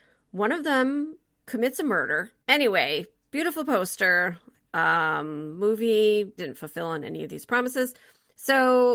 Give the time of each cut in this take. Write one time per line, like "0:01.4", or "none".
0:02.4
0:06.4

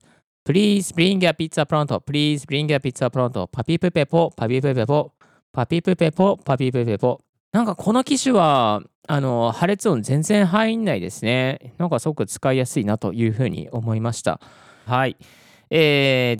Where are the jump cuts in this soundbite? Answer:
0:07.3
0:14.9

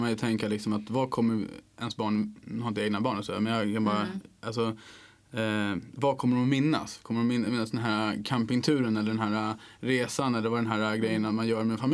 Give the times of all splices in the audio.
none

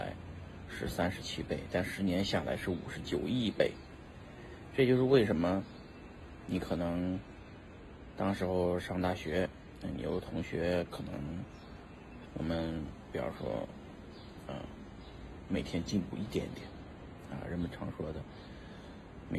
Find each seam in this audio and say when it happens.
0:12.3

